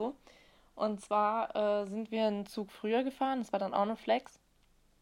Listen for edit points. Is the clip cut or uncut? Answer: uncut